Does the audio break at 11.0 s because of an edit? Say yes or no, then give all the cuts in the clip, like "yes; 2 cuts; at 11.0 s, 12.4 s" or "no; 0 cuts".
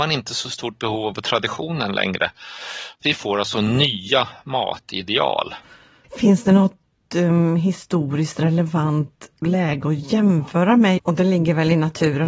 yes; 2 cuts; at 3.0 s, 11.0 s